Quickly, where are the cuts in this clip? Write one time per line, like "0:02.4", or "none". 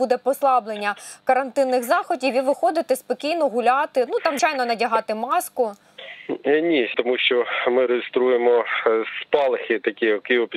0:04.4
0:06.9